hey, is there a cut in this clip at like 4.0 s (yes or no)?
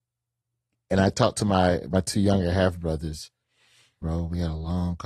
yes